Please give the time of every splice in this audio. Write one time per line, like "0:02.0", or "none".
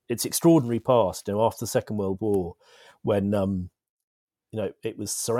none